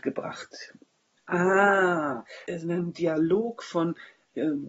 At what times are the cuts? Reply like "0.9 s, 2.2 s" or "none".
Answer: 1.2 s, 2.4 s